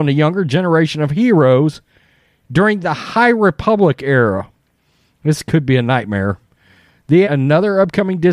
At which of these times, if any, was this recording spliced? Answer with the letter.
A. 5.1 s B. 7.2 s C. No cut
B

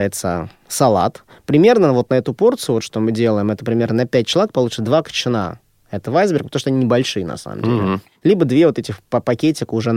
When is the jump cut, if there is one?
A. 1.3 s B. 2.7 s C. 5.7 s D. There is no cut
D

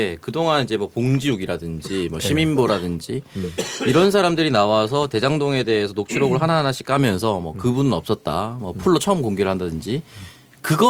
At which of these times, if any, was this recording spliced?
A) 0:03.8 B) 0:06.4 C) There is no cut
C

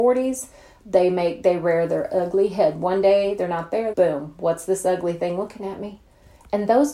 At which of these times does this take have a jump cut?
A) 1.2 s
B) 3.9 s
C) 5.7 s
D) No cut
B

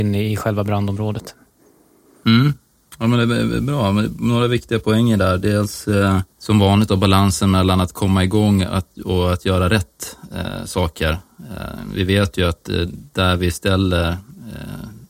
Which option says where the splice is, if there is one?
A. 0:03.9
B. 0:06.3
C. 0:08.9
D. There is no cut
B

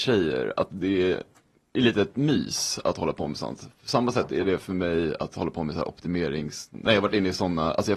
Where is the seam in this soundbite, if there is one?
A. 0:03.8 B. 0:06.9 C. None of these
C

